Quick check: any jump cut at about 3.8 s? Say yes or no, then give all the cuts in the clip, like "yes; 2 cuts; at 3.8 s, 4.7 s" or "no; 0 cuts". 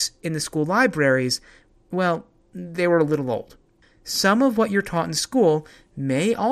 yes; 1 cut; at 3.8 s